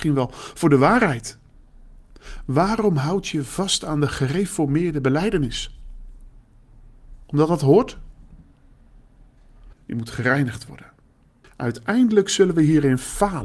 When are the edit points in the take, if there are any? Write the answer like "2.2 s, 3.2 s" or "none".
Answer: 9.7 s, 11.4 s